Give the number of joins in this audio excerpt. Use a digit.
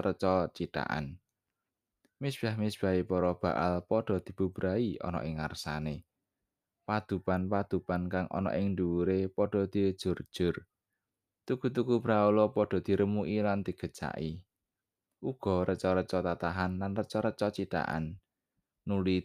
0